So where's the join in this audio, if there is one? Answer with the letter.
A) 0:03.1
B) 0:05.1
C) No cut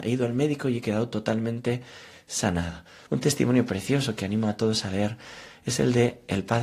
A